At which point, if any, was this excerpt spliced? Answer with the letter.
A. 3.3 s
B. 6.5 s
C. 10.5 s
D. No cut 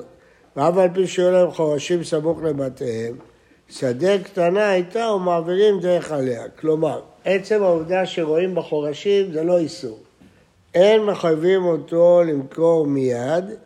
C